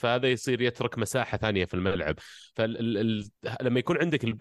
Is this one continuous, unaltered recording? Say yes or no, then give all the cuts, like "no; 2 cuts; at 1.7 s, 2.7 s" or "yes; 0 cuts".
yes; 0 cuts